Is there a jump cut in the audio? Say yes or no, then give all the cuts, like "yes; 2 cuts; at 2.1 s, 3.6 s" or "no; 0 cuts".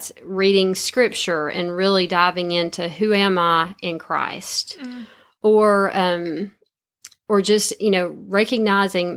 no; 0 cuts